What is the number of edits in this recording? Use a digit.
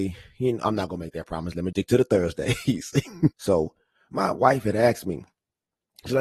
2